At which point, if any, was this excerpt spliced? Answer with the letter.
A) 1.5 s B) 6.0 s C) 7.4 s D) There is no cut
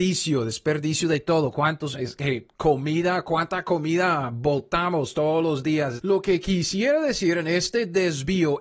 B